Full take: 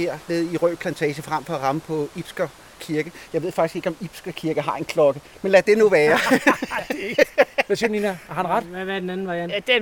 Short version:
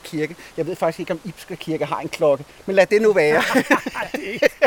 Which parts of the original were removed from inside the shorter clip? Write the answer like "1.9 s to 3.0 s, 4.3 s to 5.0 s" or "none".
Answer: none